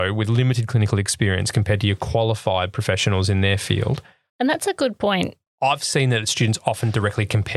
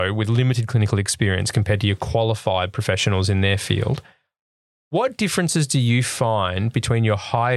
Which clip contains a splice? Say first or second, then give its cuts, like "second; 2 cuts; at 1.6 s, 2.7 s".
first; 2 cuts; at 4.3 s, 5.5 s